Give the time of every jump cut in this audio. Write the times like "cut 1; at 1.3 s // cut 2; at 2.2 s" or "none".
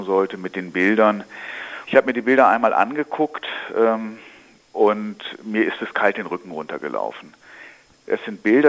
cut 1; at 1.8 s